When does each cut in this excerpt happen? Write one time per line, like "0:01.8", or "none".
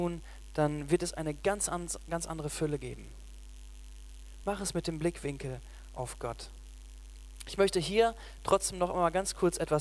none